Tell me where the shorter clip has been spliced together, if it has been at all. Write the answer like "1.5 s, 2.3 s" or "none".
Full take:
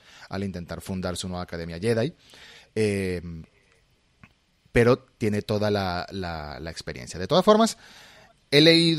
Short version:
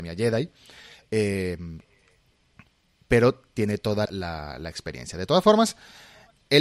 4.1 s